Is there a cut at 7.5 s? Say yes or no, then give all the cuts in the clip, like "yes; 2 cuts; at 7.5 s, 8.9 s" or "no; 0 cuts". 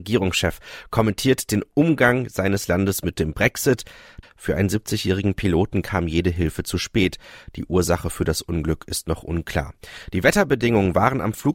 no; 1 cut; at 4.2 s